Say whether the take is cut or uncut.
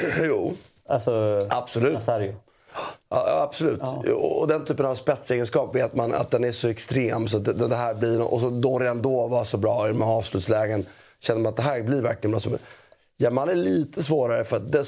uncut